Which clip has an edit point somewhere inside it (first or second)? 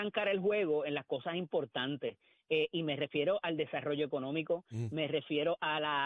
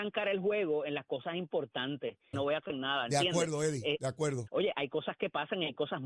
second